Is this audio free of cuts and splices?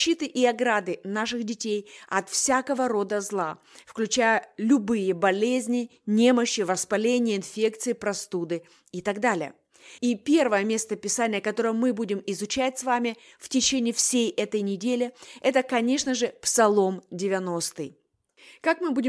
no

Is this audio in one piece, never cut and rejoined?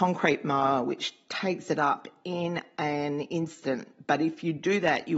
yes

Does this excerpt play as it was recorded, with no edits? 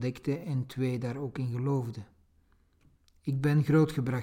yes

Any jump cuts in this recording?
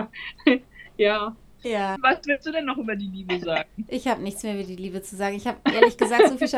yes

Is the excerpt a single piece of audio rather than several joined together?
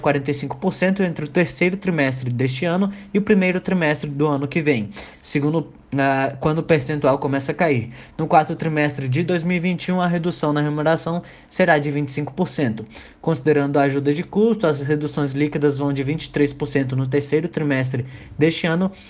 yes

